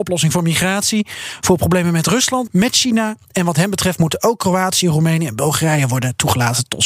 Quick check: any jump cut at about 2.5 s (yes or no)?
yes